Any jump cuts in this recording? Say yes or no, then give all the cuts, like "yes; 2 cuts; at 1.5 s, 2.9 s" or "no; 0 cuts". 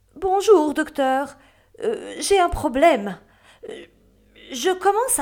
no; 0 cuts